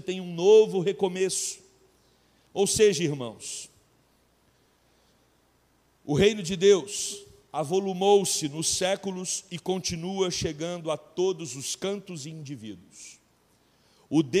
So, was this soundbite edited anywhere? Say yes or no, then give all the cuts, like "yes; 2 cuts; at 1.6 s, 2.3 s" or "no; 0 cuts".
no; 0 cuts